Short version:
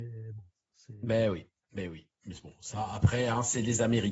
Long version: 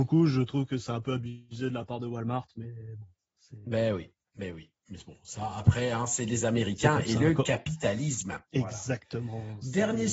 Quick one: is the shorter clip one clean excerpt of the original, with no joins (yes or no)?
yes